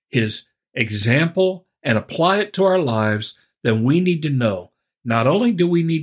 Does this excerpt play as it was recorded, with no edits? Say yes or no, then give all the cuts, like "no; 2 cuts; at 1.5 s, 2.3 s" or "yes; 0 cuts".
yes; 0 cuts